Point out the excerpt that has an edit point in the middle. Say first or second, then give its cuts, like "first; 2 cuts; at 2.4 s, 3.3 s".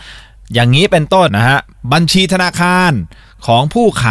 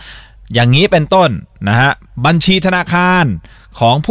first; 1 cut; at 1.3 s